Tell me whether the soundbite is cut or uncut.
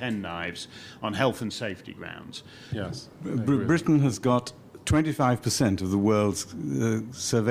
cut